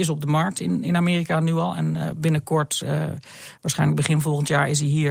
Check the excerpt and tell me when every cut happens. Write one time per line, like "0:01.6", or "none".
none